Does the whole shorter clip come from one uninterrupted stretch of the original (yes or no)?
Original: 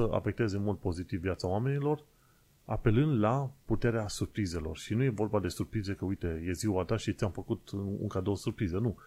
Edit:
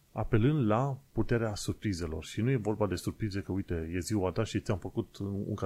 yes